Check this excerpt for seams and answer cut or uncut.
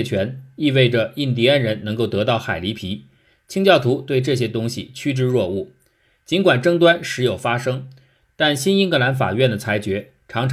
uncut